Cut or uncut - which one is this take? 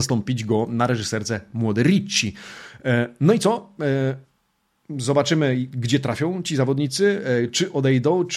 uncut